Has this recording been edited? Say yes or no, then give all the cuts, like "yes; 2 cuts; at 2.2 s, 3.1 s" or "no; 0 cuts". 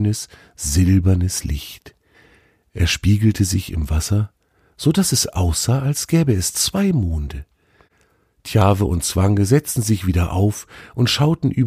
no; 0 cuts